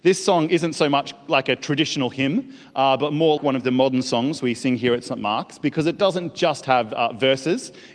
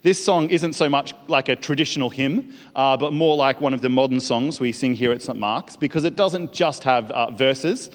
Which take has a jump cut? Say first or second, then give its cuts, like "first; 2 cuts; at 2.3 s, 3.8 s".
first; 1 cut; at 3.4 s